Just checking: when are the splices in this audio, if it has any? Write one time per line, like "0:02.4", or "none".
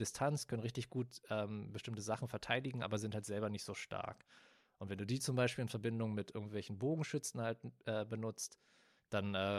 none